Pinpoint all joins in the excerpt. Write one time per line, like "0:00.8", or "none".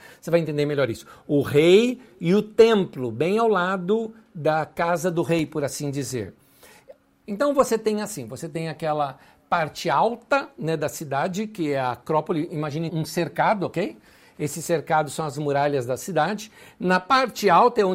0:07.2
0:12.9

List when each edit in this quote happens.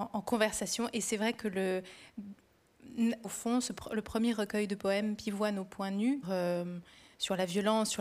0:03.2
0:06.2

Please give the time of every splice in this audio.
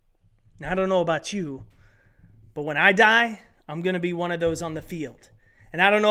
none

